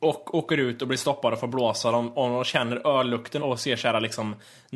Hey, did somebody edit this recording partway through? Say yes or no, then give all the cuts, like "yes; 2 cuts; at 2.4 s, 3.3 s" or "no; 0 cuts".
yes; 1 cut; at 3.4 s